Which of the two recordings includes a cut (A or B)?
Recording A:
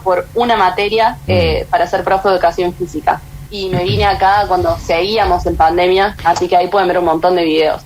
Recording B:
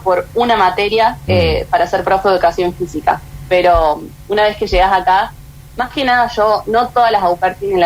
A